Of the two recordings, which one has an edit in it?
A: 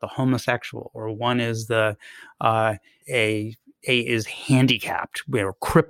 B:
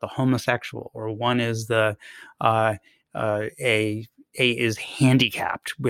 A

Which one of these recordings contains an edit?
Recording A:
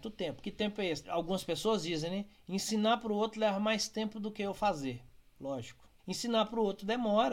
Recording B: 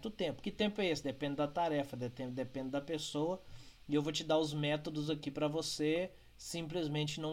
A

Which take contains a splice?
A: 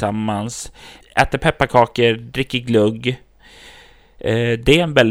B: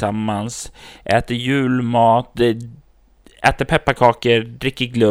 A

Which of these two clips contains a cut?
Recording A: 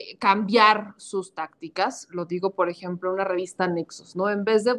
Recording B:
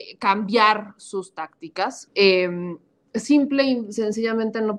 B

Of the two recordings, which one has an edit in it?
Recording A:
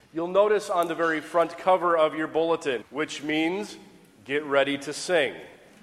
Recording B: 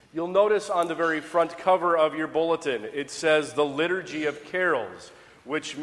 A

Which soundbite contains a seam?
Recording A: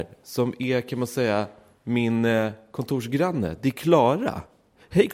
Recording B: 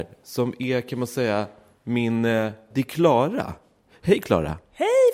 B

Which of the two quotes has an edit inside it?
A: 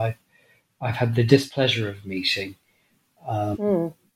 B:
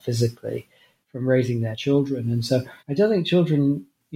B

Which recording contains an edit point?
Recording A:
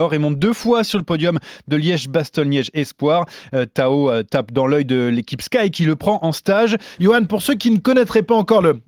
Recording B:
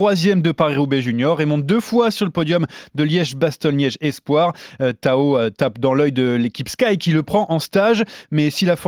A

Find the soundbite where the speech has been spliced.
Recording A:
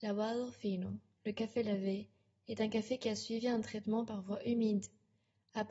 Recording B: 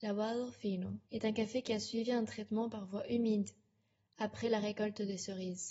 B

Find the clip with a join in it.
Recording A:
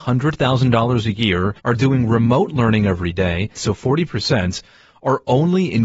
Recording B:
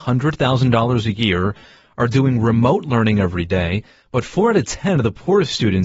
A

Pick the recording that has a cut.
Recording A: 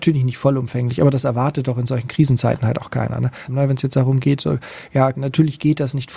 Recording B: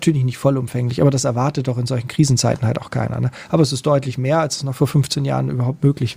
A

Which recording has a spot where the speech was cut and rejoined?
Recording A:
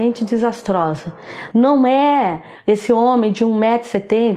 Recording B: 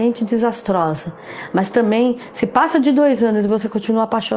A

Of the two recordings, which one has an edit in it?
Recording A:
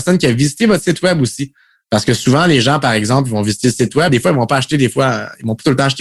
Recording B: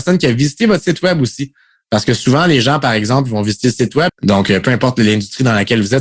B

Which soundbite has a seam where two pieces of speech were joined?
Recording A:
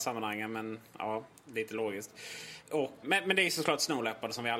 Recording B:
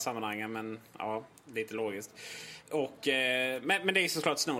A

